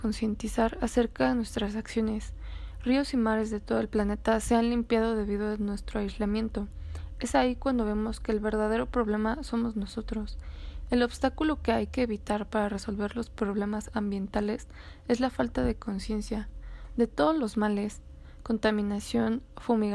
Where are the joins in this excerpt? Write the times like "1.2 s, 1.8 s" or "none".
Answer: none